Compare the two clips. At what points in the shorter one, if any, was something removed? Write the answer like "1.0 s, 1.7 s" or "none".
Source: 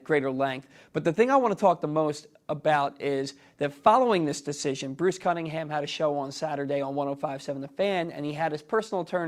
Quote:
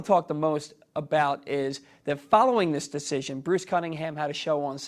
none